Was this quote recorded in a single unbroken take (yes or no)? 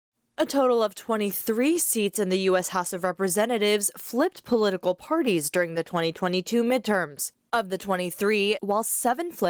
no